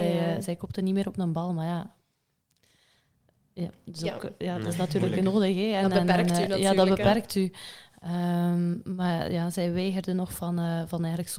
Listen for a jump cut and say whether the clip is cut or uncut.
uncut